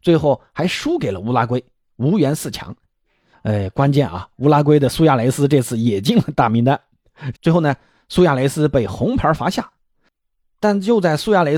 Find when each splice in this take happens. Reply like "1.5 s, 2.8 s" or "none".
3.3 s, 7.3 s